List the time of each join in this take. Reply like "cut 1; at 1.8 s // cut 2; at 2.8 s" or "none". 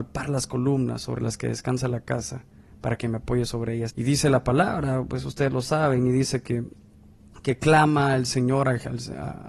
cut 1; at 3.9 s